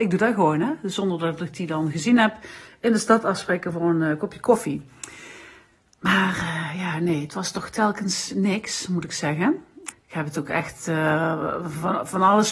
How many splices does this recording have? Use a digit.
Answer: 1